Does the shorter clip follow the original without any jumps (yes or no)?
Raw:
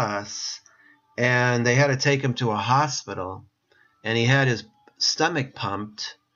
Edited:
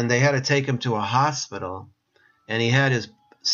yes